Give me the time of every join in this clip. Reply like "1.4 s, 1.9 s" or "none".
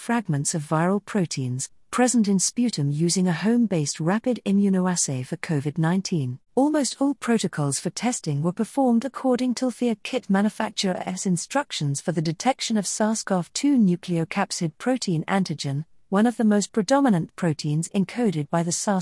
6.5 s